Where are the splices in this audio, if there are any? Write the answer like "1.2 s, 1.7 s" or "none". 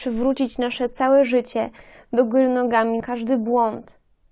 3.0 s